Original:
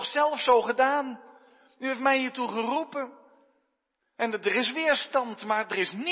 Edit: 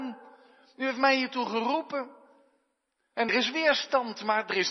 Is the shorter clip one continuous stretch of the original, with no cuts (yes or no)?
no